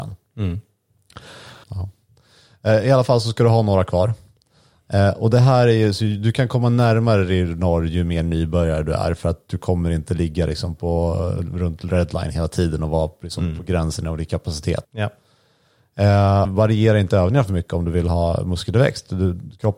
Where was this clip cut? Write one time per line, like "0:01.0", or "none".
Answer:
0:01.6
0:14.8
0:16.4